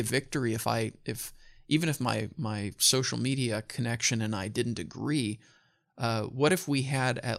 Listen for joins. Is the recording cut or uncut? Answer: uncut